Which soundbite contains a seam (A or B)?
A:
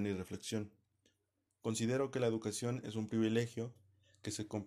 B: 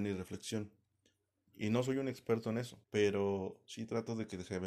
B